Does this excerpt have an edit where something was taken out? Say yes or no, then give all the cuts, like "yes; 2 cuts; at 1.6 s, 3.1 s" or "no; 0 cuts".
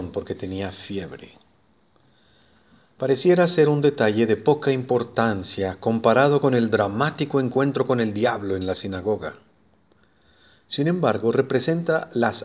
no; 0 cuts